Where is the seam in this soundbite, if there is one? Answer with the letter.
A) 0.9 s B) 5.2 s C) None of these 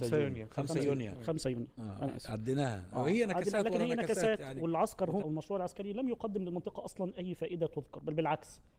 B